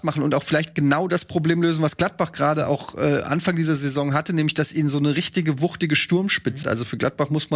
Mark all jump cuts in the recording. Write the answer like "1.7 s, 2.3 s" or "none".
6.6 s